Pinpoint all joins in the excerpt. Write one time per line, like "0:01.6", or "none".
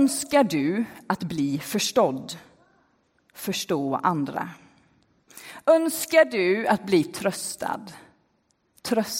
none

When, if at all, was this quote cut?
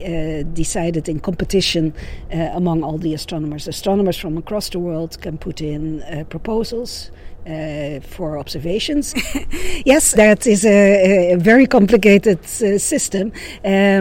0:09.1
0:10.1

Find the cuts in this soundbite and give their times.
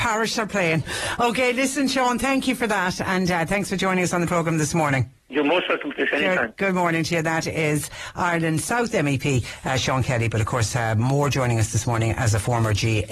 0:05.2

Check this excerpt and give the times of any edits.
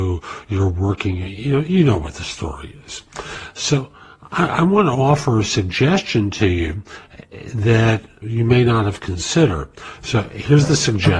0:08.2
0:10.0

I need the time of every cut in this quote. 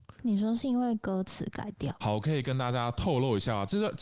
0:02.0

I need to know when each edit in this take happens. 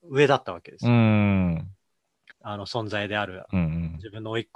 0:02.3

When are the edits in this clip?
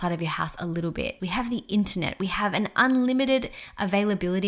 0:01.2

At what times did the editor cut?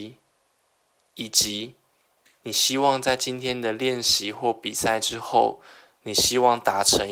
none

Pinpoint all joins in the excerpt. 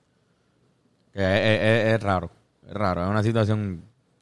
none

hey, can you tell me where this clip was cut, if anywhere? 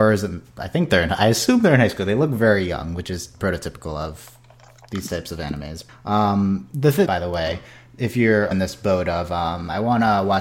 0:05.9
0:07.1
0:08.5

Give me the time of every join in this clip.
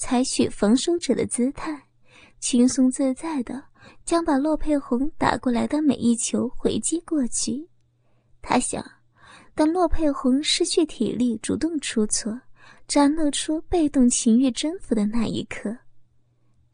none

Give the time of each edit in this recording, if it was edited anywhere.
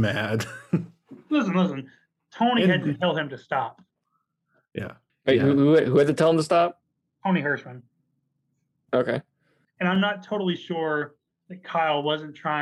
0:05.1
0:09.6

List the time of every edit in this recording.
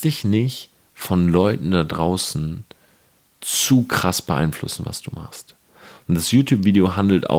none

